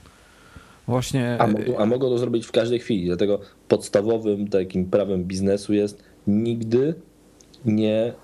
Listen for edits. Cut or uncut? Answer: uncut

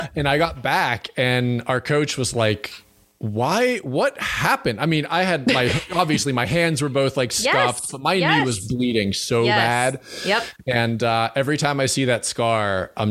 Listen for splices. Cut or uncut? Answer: uncut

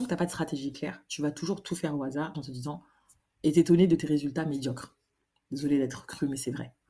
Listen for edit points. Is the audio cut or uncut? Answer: cut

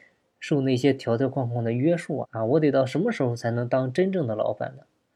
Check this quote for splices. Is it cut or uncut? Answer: cut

